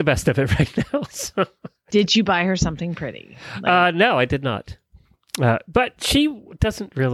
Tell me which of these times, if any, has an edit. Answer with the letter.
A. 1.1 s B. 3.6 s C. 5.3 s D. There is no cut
D